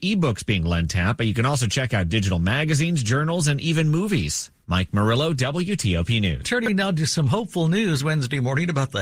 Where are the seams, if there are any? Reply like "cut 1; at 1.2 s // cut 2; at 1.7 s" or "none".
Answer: cut 1; at 6.4 s